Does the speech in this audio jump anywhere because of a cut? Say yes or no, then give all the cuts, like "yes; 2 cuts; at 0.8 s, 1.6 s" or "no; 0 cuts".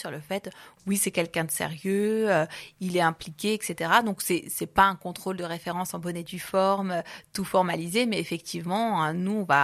no; 0 cuts